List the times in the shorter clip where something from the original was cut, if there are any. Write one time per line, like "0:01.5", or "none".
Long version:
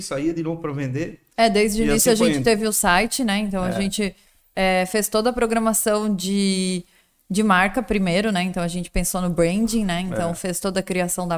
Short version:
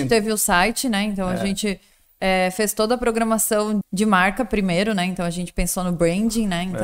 0:03.8

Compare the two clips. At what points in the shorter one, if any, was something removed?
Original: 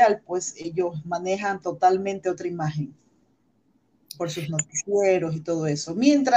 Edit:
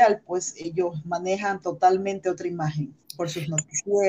0:03.0

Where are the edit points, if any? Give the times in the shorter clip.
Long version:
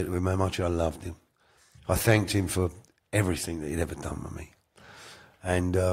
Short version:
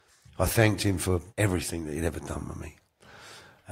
0:01.3

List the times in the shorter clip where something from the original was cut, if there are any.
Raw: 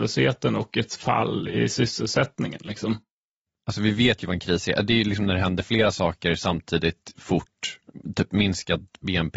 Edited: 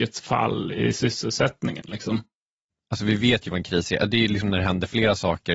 none

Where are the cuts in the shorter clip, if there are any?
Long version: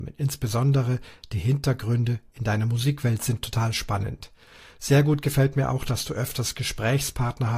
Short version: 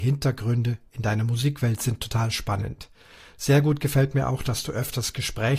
none

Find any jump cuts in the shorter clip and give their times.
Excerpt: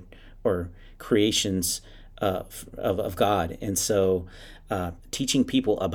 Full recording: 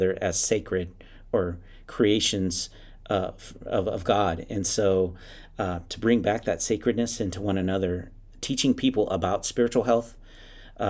0:05.0

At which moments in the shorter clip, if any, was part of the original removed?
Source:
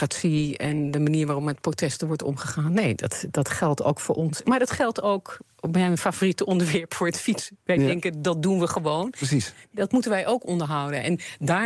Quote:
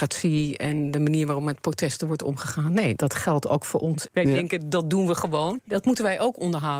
0:03.0
0:04.1
0:05.6

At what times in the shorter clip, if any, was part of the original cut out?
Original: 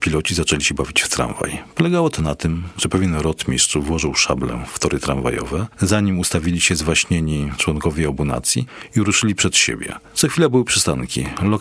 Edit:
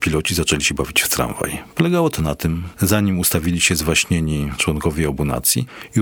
0:02.7

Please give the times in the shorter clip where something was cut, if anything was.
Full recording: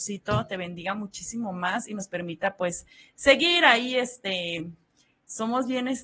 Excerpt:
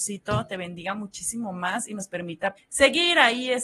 0:02.6

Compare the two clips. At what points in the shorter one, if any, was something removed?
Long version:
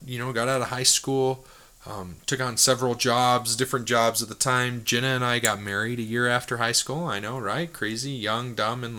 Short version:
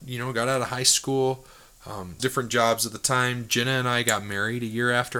0:02.2

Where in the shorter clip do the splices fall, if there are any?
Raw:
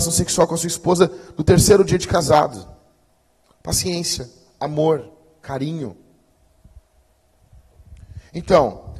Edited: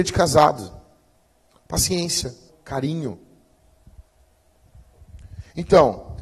0:02.5

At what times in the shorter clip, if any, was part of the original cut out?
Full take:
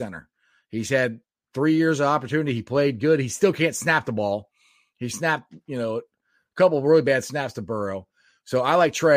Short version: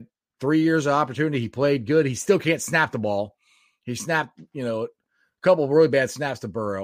none

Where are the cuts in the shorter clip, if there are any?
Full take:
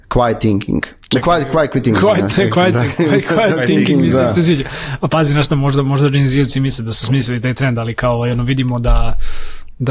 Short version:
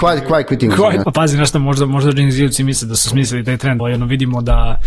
0:01.0
0:03.8

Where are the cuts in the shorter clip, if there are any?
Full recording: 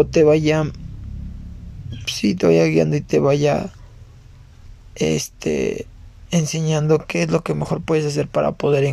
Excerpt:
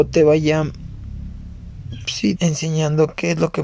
0:02.4

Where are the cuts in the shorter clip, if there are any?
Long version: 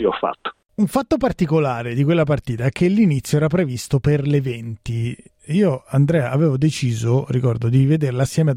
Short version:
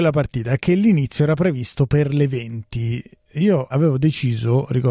0:03.7

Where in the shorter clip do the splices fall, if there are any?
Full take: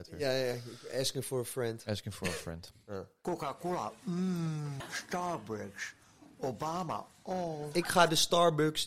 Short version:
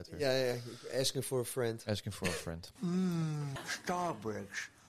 0:02.8

